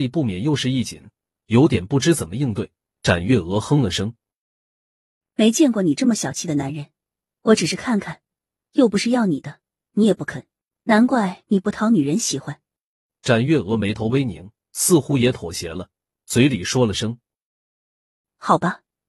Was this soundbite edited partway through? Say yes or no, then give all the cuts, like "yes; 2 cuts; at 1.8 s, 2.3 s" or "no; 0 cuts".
yes; 1 cut; at 12.8 s